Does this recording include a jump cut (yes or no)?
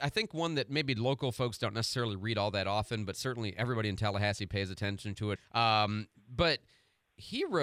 yes